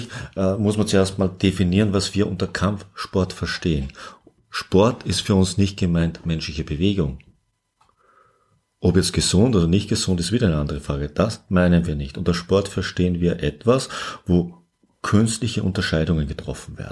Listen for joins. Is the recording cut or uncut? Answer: uncut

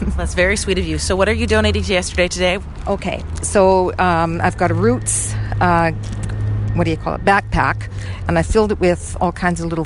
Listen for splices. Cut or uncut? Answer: uncut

